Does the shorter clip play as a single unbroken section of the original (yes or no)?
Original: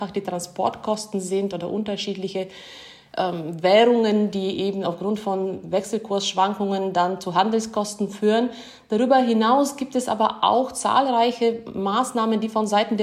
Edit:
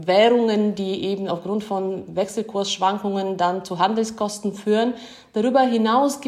yes